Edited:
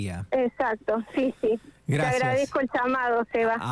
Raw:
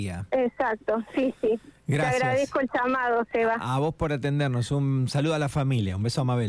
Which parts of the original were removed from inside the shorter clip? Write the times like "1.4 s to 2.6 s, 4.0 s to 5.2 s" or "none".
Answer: none